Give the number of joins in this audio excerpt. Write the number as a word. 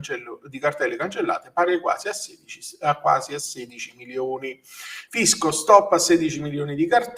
one